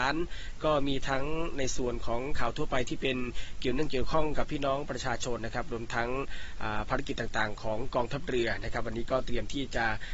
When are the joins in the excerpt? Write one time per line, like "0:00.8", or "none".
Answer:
0:05.4